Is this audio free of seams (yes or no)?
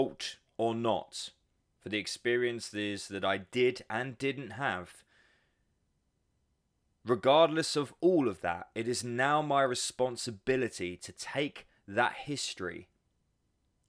no